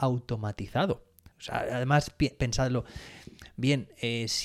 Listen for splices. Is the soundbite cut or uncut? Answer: cut